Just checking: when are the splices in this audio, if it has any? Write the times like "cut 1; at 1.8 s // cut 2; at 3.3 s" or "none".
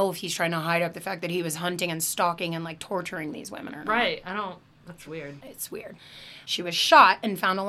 cut 1; at 5.1 s // cut 2; at 6.4 s